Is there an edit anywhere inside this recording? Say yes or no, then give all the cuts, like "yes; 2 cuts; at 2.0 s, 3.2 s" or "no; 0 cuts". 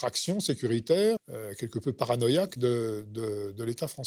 yes; 1 cut; at 1.2 s